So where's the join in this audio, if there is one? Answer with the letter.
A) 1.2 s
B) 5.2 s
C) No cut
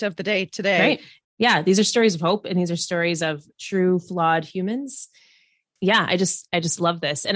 A